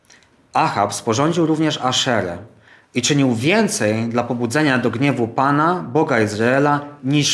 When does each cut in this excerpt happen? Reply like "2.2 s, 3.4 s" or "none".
none